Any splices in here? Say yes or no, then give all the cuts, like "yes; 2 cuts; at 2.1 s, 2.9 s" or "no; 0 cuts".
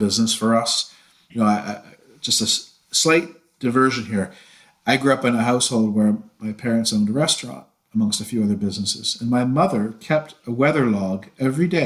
yes; 1 cut; at 1.3 s